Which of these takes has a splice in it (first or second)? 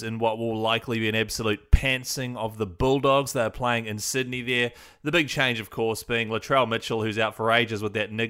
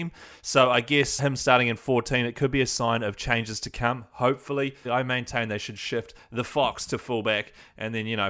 second